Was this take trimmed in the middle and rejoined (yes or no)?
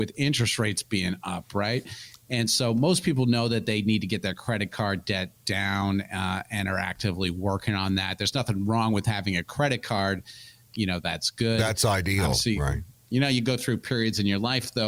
yes